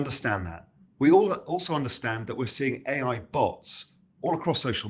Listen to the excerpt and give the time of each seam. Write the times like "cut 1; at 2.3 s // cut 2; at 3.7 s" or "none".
none